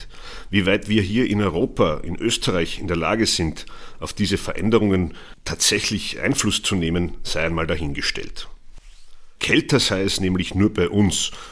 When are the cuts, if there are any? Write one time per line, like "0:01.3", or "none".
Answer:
0:09.4